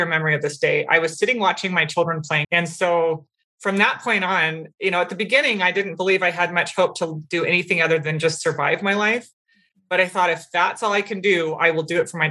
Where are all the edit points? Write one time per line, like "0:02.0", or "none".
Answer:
0:02.4

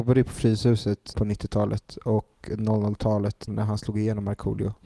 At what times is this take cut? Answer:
0:01.1
0:03.5

